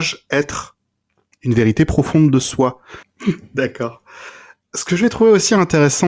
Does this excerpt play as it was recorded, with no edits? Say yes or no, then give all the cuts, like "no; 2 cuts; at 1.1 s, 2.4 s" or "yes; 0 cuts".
no; 1 cut; at 3.0 s